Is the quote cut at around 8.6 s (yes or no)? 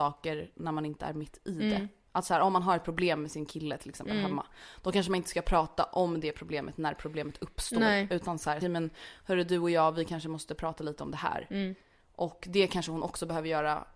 yes